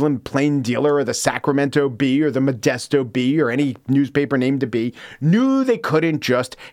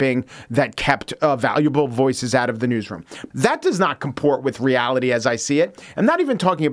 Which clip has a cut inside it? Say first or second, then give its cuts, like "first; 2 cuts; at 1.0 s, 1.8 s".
second; 1 cut; at 3.3 s